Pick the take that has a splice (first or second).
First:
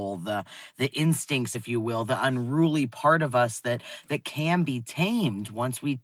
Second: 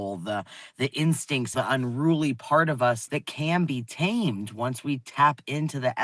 second